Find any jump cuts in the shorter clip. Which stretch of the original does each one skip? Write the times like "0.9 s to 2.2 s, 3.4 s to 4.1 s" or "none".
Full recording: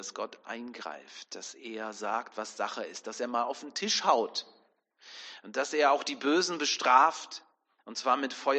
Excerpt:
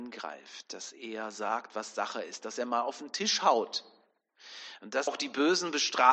5.7 s to 5.9 s